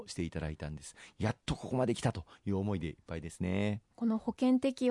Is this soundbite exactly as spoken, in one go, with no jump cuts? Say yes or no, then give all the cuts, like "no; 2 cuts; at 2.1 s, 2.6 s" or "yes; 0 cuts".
no; 1 cut; at 3.9 s